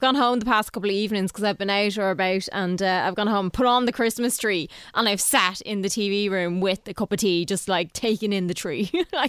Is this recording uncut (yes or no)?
yes